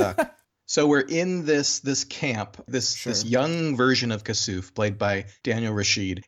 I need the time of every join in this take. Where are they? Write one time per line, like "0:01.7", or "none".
0:02.7